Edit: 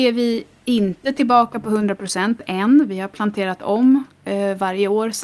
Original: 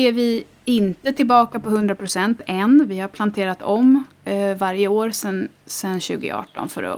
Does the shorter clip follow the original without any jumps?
yes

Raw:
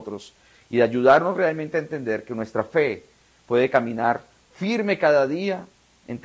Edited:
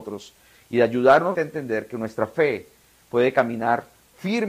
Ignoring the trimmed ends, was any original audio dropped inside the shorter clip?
yes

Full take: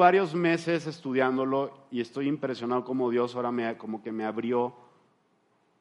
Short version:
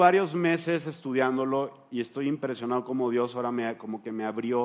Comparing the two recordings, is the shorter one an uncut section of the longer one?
yes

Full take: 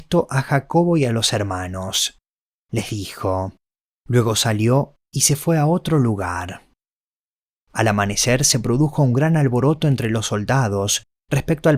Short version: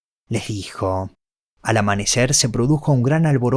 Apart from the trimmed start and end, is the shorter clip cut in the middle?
yes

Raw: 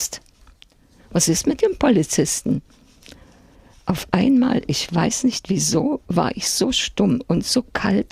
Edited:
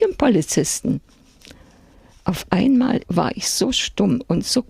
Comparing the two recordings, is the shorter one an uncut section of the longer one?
no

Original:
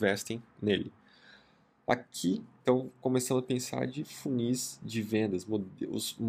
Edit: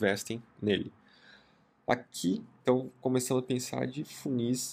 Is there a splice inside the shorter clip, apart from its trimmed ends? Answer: no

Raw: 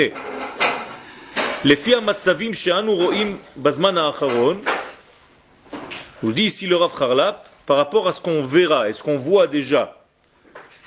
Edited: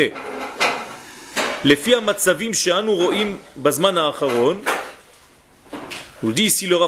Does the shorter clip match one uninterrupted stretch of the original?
yes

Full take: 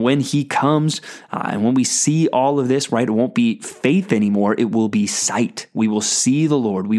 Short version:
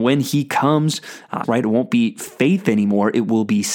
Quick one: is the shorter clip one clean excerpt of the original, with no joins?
no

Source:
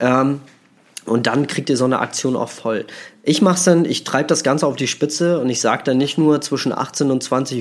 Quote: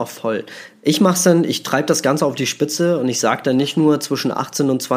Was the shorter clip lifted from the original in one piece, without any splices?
yes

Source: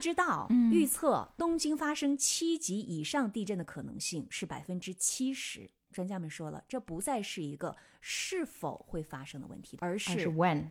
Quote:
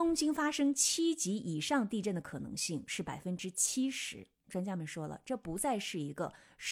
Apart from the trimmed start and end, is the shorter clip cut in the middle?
no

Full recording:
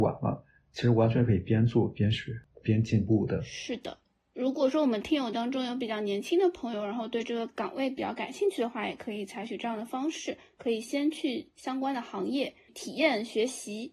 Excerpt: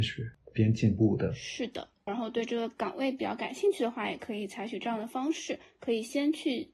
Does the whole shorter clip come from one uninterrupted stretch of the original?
no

